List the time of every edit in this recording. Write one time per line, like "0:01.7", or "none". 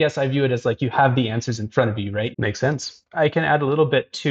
0:02.3